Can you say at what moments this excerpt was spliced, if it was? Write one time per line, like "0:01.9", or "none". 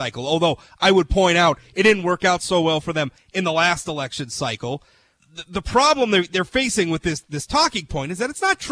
0:05.2